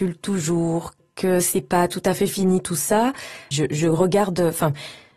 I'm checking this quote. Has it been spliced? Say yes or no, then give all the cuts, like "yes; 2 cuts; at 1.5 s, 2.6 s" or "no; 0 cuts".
yes; 1 cut; at 3.5 s